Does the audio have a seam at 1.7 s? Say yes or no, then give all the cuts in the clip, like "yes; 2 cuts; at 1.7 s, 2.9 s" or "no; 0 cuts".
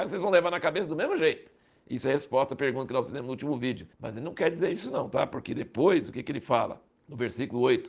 no; 1 cut; at 3.9 s